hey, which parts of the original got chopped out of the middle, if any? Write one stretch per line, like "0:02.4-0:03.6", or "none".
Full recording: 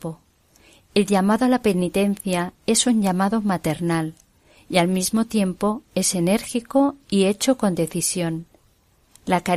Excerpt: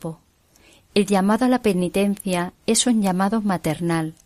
none